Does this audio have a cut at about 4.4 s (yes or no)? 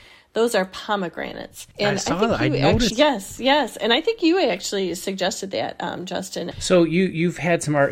no